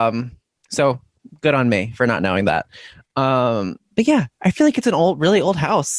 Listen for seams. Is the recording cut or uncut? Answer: uncut